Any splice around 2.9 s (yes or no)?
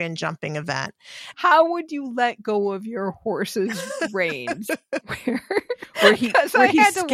no